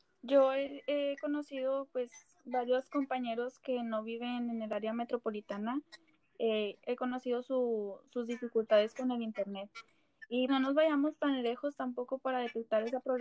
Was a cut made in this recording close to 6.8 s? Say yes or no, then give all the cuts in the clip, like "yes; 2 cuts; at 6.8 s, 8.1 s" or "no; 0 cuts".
yes; 2 cuts; at 6.8 s, 10.5 s